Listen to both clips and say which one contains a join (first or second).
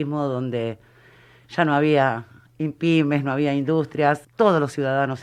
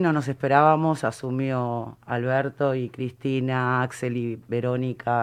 first